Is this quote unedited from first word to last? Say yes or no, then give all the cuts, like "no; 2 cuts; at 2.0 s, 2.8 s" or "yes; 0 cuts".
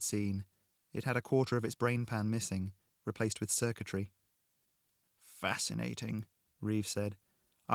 no; 1 cut; at 5.0 s